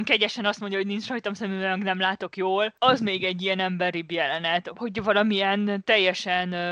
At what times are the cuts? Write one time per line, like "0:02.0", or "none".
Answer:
none